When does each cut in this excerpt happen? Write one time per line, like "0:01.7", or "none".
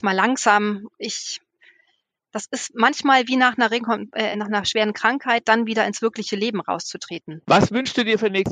0:04.3
0:07.4